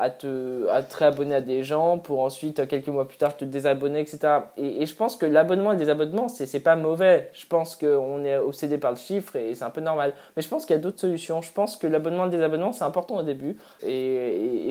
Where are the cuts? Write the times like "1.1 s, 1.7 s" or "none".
13.8 s